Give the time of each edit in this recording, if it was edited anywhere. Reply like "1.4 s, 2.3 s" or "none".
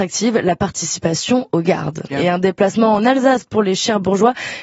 2.1 s